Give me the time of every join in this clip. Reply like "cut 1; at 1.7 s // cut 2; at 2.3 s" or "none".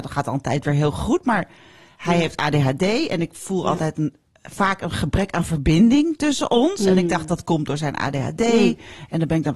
none